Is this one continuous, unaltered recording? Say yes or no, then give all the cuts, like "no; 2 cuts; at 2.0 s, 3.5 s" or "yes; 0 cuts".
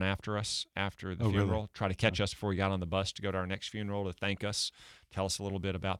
yes; 0 cuts